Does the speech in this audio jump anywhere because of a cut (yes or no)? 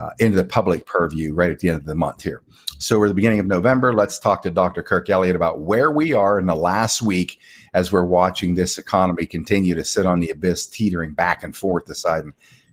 no